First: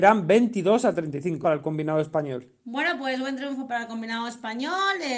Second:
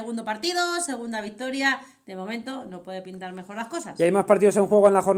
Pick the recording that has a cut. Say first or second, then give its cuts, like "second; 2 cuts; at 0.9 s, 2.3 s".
first; 1 cut; at 1.4 s